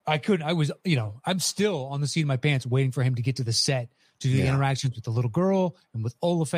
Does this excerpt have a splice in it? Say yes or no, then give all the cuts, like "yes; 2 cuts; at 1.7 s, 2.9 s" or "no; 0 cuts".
no; 0 cuts